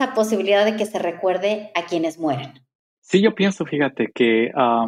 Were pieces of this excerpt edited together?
no; 0 cuts

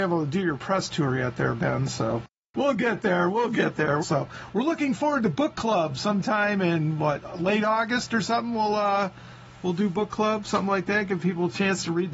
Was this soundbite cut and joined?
yes; 1 cut; at 4.0 s

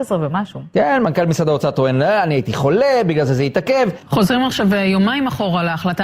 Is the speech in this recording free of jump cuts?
yes; 0 cuts

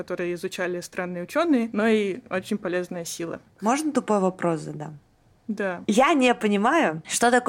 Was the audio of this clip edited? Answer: no; 0 cuts

